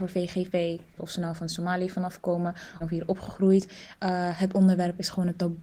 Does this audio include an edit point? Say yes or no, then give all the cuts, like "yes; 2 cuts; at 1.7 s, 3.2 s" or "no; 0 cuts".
yes; 2 cuts; at 1.0 s, 2.8 s